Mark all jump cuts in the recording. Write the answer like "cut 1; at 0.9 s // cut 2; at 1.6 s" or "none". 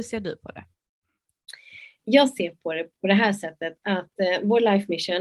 none